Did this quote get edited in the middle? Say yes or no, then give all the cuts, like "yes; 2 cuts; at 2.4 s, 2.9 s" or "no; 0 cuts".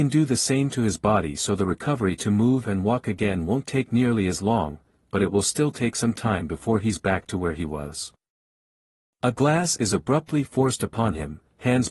no; 0 cuts